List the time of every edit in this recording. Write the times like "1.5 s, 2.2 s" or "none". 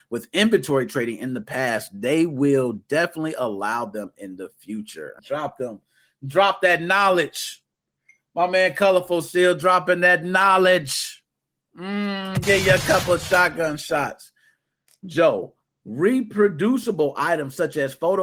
5.2 s